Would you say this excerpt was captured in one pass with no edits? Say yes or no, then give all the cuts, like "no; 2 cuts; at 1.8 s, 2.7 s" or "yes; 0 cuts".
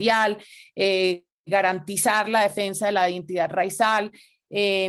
yes; 0 cuts